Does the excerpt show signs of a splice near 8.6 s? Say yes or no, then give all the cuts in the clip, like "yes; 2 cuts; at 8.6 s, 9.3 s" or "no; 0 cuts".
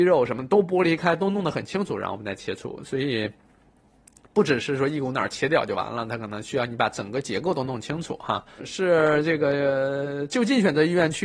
yes; 1 cut; at 8.6 s